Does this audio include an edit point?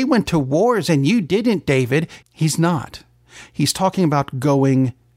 yes; 1 cut; at 2.2 s

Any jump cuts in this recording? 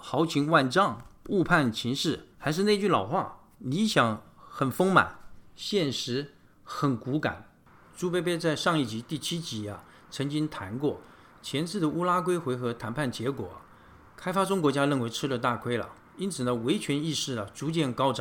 yes; 1 cut; at 7.8 s

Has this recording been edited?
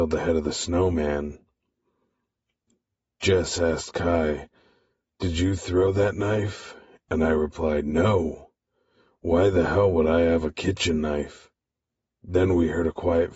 no; 0 cuts

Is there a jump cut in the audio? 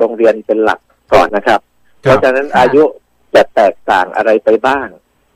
yes; 1 cut; at 1.3 s

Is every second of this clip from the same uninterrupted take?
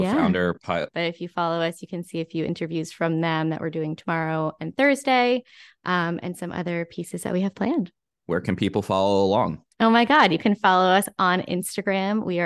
no; 3 cuts; at 0.9 s, 8.2 s, 9.7 s

